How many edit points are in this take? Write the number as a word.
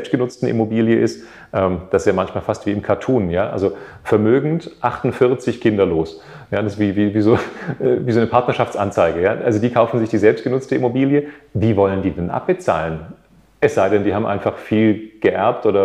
zero